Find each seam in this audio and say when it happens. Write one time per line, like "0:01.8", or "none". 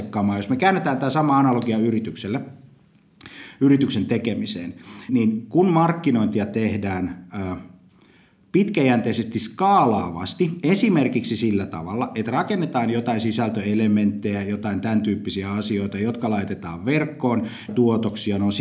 0:05.1
0:17.7